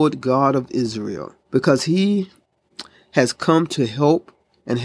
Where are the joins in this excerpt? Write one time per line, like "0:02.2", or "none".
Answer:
0:01.4